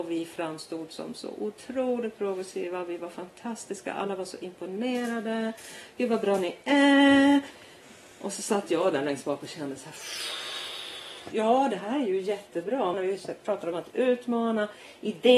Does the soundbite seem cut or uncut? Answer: cut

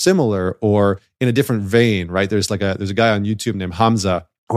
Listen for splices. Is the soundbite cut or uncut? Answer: uncut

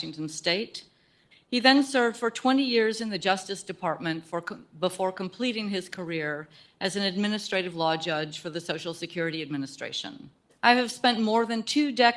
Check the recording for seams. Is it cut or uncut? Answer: cut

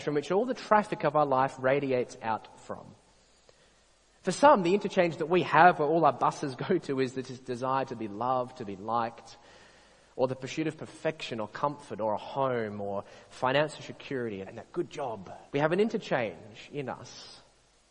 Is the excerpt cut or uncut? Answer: cut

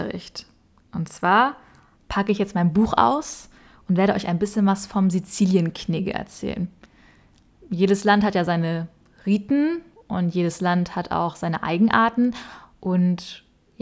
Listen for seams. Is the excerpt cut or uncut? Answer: uncut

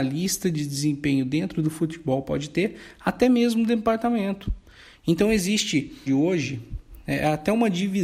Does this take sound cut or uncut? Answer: cut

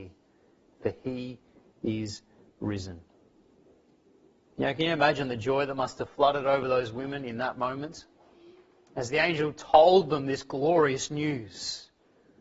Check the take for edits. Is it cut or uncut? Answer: uncut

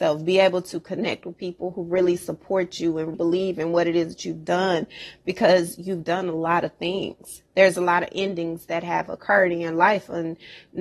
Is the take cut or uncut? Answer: cut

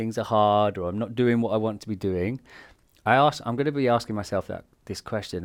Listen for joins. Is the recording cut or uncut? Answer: uncut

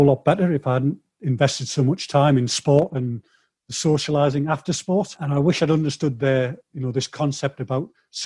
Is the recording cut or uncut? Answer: uncut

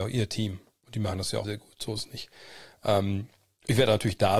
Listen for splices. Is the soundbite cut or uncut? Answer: cut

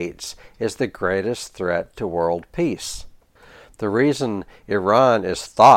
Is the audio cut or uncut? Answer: uncut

